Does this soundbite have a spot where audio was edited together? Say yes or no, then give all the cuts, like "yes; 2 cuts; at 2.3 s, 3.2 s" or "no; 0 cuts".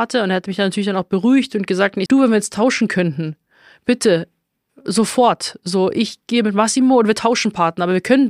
yes; 1 cut; at 2.1 s